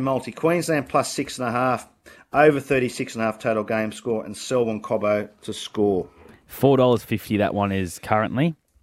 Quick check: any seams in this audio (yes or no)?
no